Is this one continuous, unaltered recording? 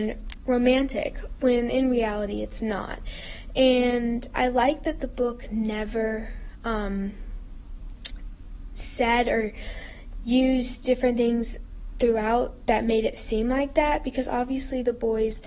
yes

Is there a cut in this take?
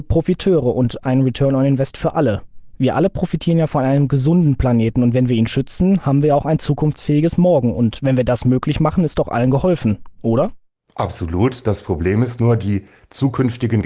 no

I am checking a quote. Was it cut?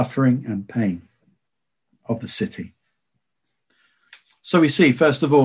no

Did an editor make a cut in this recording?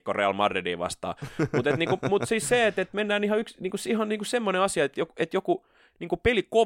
no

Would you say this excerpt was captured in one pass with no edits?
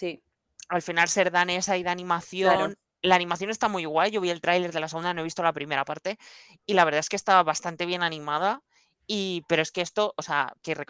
yes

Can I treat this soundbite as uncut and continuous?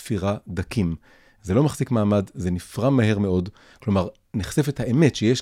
yes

